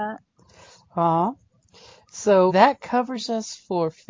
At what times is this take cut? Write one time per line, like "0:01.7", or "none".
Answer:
0:02.5